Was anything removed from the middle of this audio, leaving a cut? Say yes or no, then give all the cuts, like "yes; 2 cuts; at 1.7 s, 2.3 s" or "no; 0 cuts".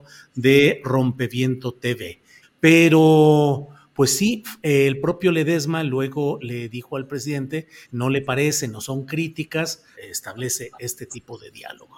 yes; 3 cuts; at 2.4 s, 7.8 s, 9.9 s